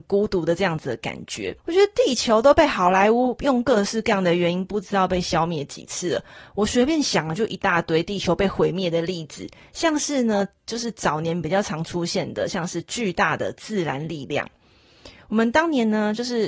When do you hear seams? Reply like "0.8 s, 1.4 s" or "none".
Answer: 1.6 s